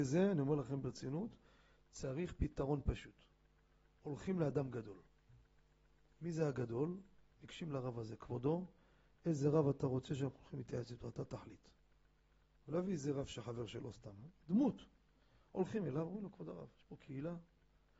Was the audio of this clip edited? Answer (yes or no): no